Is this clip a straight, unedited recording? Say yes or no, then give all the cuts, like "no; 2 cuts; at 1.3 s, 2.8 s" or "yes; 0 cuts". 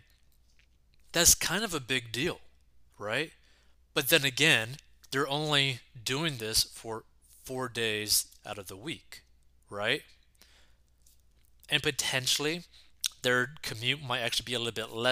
yes; 0 cuts